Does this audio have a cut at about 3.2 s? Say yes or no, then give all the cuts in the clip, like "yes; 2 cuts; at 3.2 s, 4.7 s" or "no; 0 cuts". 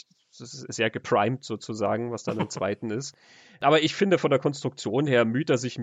no; 0 cuts